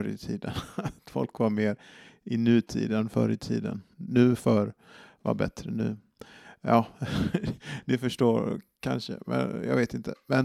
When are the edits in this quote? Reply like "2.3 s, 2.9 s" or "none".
3.9 s